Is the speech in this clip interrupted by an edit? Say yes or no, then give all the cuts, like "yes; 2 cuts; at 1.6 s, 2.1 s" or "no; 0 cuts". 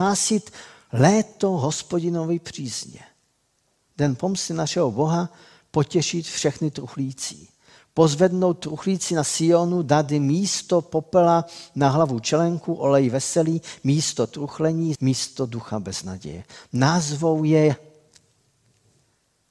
yes; 1 cut; at 14.9 s